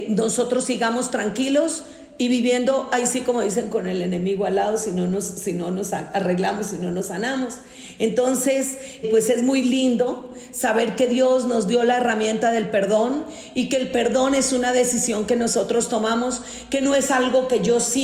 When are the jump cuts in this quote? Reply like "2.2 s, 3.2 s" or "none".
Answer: 9.0 s